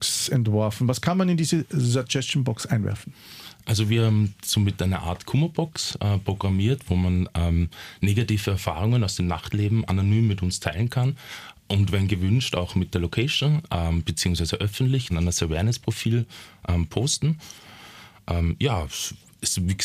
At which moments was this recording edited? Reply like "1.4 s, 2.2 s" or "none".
15.1 s